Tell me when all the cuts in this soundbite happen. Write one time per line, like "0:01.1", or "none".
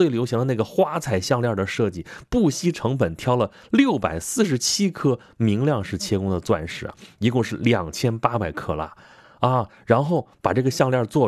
none